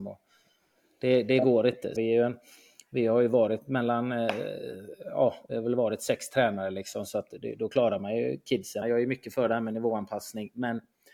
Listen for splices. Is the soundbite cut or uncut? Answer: cut